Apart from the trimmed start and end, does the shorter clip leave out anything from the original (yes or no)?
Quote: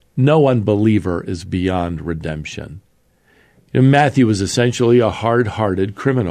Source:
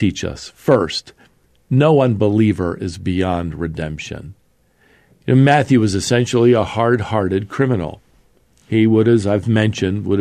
no